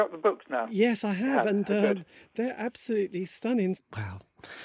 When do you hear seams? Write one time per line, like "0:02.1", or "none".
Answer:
0:03.8